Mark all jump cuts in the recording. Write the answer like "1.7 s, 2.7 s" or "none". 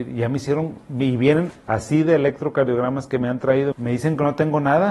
1.5 s, 3.7 s